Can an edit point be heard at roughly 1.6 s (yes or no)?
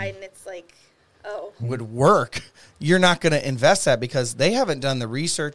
yes